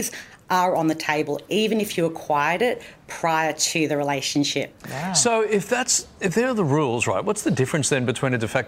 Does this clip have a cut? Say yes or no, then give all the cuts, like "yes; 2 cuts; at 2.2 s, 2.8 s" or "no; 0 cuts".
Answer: no; 0 cuts